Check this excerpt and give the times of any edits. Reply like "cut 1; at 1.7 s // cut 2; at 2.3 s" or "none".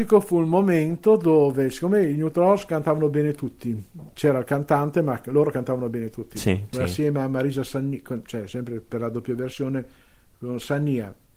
cut 1; at 6.7 s

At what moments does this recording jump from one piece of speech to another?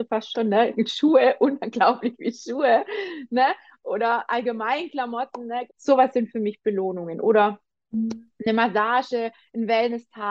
cut 1; at 5.7 s

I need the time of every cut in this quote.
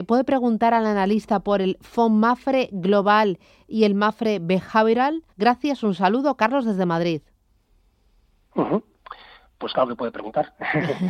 cut 1; at 5.3 s

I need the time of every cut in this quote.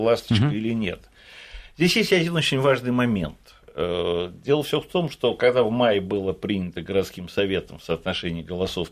none

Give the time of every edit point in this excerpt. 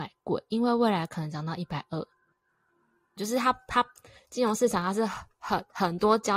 cut 1; at 3.2 s

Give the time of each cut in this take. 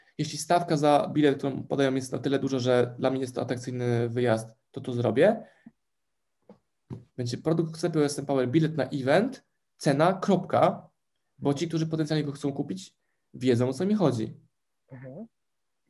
cut 1; at 5.7 s // cut 2; at 7.1 s

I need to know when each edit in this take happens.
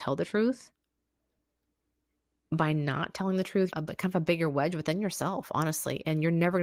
cut 1; at 3.7 s

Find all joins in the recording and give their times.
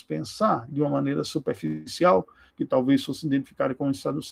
cut 1; at 2.5 s

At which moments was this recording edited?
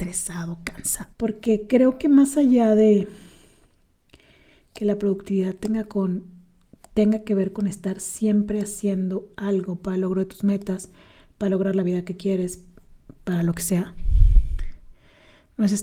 cut 1; at 1.1 s

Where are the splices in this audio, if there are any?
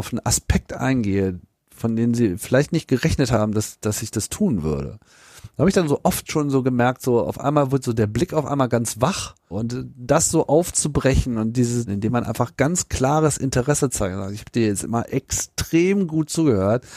cut 1; at 9.5 s // cut 2; at 11.9 s

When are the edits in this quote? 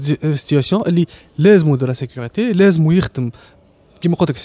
none

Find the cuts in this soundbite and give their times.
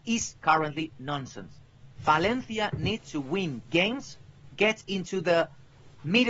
none

